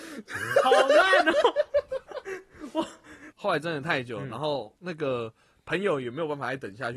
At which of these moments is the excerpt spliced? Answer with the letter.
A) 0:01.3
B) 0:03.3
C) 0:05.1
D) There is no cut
B